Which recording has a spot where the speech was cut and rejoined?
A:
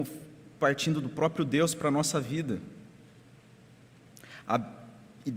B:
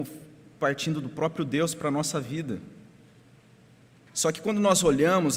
B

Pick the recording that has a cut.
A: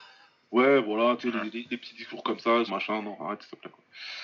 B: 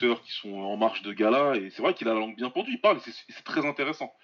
A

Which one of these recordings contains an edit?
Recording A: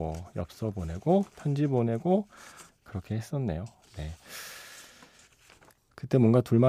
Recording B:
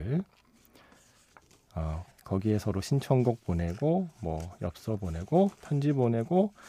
B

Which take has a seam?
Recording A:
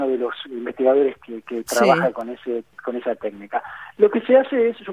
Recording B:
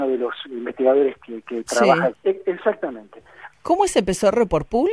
B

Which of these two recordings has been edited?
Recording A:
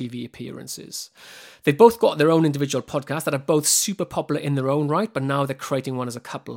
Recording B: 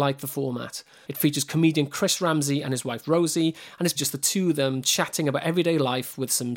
B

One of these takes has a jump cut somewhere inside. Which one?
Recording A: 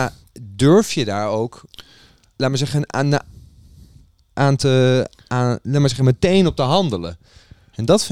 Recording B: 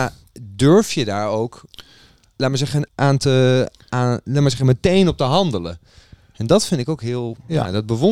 B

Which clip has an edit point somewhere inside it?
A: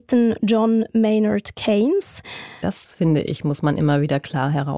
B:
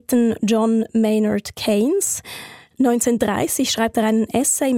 A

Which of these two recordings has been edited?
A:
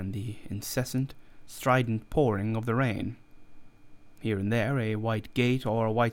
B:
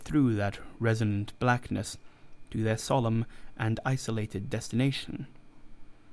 A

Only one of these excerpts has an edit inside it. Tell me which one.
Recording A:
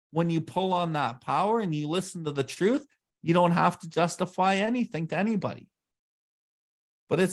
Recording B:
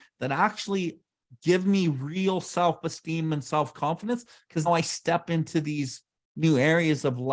B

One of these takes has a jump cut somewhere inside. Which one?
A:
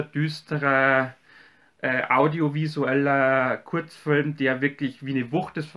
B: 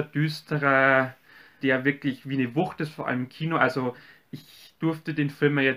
B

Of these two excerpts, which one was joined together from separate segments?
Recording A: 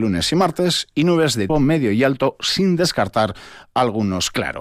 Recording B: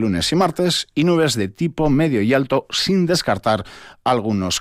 A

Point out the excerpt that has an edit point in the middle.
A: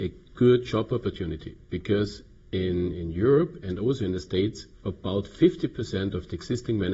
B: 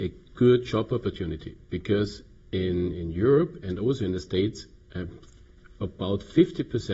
A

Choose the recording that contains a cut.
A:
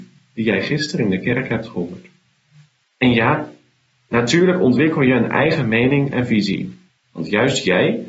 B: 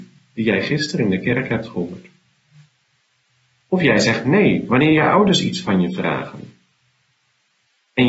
A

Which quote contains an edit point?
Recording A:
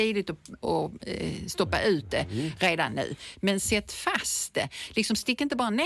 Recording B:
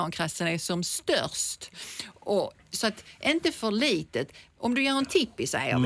A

